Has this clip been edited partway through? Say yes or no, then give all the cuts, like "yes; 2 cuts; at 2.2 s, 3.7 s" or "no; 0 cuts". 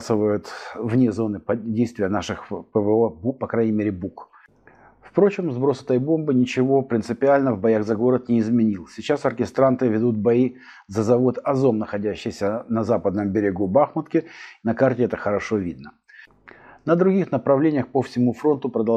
yes; 1 cut; at 14.6 s